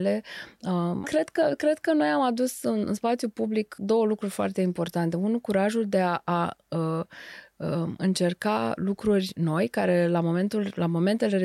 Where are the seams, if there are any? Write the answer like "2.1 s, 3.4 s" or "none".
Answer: 1.0 s